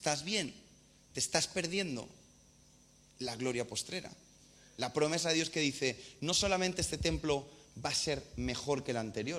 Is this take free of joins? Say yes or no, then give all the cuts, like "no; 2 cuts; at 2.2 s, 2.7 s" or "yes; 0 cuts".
yes; 0 cuts